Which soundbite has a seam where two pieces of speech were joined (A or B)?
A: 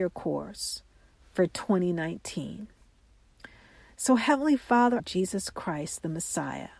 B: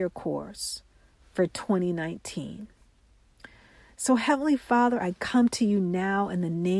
A